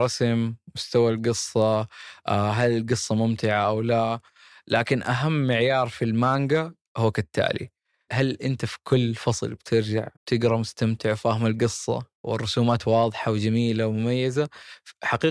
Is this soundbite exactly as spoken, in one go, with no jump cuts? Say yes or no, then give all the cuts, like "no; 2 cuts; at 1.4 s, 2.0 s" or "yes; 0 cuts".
no; 3 cuts; at 8.1 s, 10.1 s, 12.1 s